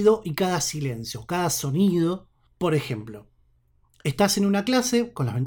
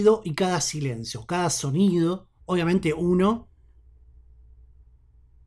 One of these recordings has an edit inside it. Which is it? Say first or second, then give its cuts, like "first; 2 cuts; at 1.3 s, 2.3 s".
second; 1 cut; at 2.4 s